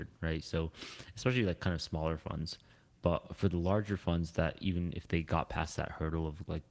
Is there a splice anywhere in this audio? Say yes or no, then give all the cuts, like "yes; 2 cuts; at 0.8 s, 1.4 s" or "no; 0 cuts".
no; 0 cuts